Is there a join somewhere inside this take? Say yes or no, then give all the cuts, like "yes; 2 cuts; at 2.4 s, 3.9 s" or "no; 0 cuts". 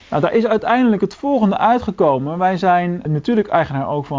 yes; 1 cut; at 3.1 s